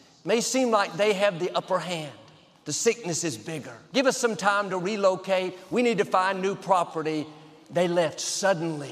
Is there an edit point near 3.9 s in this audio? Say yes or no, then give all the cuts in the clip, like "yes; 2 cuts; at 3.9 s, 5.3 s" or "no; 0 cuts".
yes; 1 cut; at 3.9 s